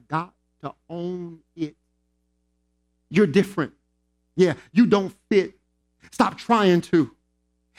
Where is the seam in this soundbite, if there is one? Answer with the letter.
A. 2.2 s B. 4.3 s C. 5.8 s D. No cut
D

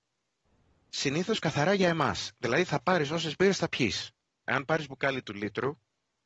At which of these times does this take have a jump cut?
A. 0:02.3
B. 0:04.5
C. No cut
B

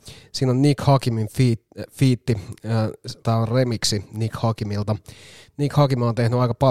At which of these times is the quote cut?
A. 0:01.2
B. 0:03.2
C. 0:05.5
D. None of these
B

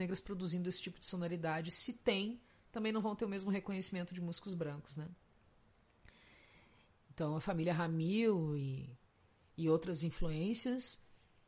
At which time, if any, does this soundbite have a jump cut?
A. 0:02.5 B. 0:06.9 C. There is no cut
B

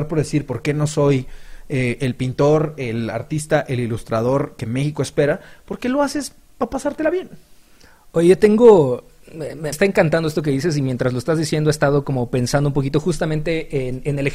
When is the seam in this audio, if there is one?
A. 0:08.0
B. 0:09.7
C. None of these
B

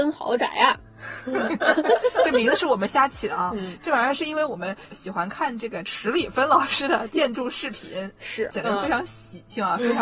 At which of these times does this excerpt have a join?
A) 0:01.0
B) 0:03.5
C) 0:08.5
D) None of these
C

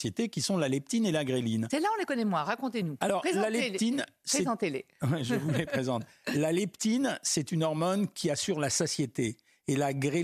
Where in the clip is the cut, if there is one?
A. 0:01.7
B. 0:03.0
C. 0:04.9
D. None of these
D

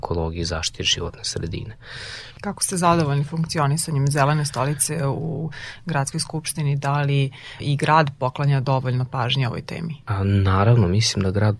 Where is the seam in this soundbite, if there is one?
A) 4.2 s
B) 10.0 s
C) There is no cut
C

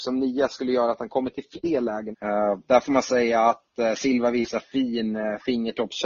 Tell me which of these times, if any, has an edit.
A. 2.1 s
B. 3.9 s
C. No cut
A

